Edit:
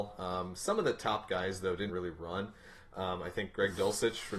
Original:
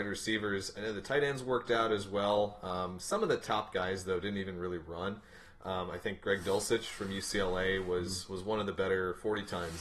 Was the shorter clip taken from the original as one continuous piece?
no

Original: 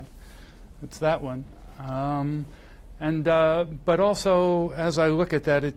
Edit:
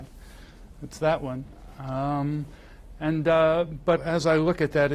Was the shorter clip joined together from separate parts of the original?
yes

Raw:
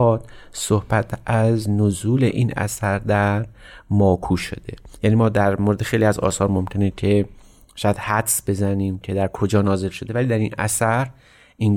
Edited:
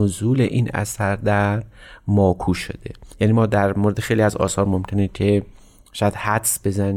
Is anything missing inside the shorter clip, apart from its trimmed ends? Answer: no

